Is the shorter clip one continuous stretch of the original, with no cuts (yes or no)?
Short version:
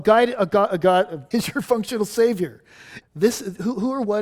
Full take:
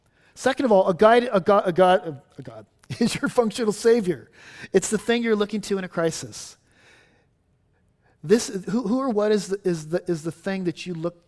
no